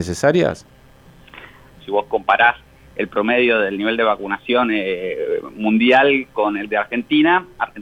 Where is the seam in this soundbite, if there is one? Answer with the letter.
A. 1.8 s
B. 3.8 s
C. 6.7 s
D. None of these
A